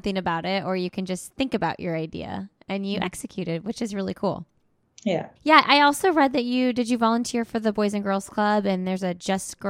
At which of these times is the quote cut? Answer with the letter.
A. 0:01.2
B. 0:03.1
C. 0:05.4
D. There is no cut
C